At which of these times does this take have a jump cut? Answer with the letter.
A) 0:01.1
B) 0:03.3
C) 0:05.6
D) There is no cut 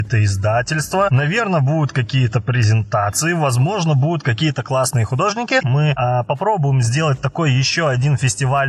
C